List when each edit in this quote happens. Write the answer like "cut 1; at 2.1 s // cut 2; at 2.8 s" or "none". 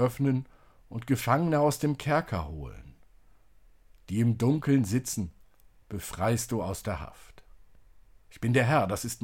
none